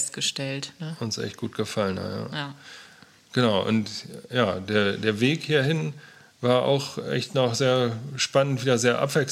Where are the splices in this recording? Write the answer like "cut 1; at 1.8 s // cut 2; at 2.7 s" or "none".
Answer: none